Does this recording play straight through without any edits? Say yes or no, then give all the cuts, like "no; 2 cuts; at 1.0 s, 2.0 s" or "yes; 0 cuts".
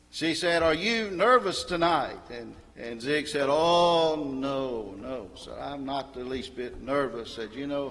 no; 1 cut; at 2.7 s